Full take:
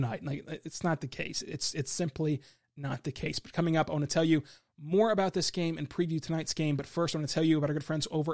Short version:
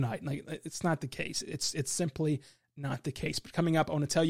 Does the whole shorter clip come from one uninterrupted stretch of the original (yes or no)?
yes